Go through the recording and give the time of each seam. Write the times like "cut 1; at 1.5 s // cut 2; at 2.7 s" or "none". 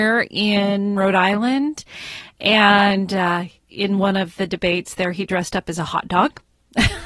none